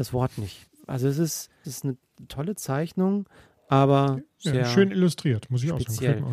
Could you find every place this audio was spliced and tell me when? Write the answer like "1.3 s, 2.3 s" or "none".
1.6 s